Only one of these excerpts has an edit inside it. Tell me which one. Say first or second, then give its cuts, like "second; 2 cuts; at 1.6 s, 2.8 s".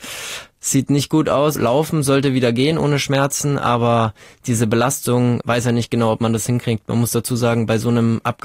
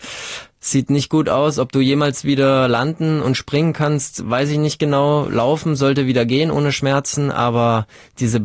first; 1 cut; at 1.6 s